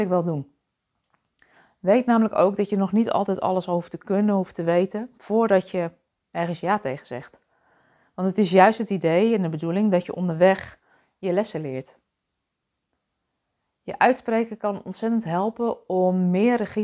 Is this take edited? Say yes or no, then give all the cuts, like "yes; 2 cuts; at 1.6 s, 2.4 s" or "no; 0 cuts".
no; 0 cuts